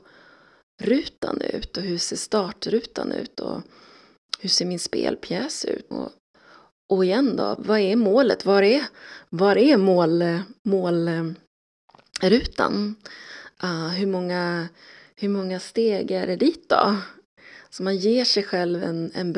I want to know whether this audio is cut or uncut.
cut